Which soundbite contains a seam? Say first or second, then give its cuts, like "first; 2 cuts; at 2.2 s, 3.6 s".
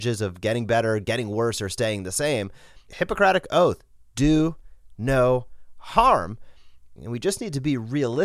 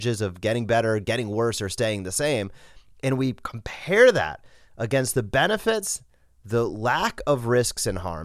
first; 2 cuts; at 2.9 s, 7.0 s